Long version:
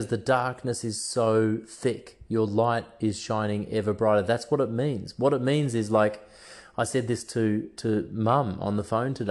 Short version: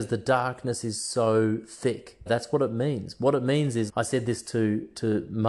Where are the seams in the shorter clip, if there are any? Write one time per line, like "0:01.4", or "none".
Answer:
0:02.3
0:03.9